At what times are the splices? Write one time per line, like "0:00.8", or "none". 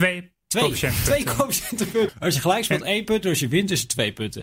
0:02.1